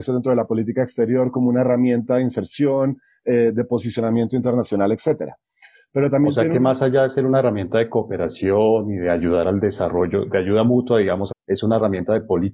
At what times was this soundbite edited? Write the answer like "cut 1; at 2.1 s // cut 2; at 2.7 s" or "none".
cut 1; at 10.3 s // cut 2; at 11.3 s